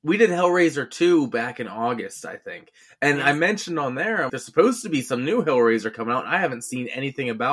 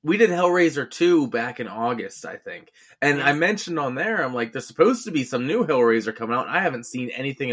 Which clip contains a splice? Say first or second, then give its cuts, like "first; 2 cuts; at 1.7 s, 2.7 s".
first; 1 cut; at 4.3 s